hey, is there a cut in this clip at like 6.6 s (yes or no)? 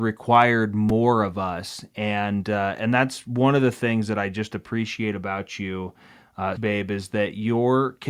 yes